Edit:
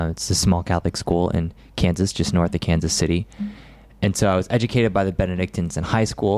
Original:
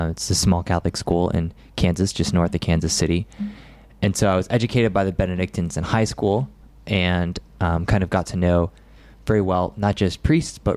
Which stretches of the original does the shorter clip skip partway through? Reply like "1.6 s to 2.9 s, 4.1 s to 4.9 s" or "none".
none